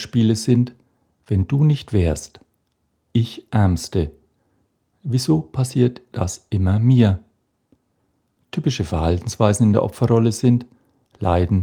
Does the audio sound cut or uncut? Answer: uncut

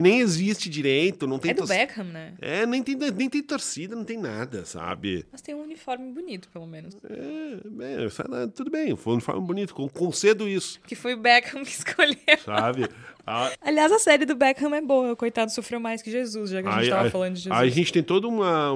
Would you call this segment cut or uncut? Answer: cut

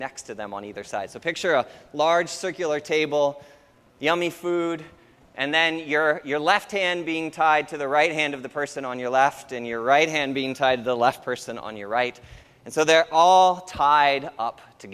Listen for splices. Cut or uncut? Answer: uncut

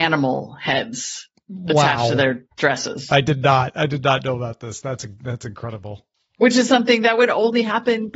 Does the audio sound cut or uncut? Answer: uncut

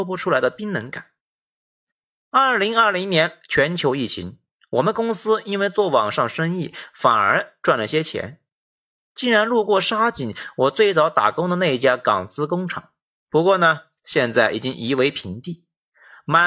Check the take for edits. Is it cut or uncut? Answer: cut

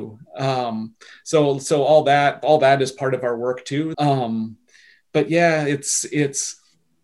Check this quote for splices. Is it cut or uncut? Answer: cut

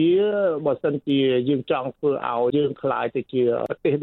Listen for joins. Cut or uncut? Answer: cut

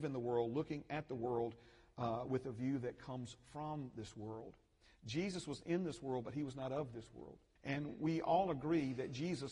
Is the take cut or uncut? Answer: cut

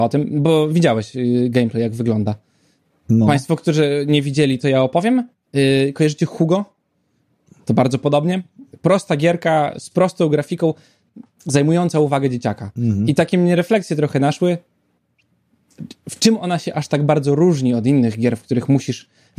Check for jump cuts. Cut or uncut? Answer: uncut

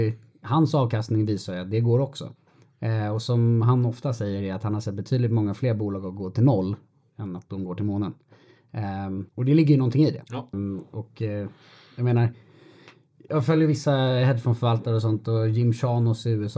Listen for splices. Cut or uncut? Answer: cut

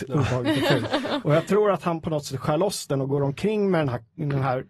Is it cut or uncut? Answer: uncut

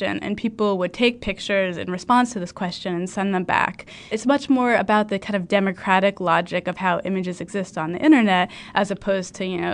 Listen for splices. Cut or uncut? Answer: cut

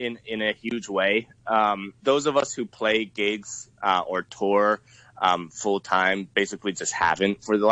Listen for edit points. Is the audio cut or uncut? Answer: cut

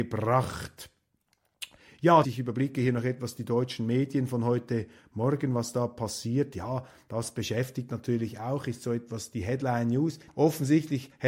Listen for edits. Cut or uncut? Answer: cut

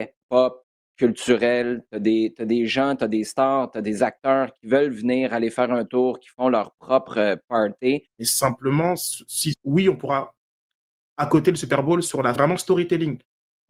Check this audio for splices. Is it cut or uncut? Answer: cut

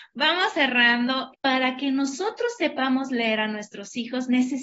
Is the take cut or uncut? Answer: cut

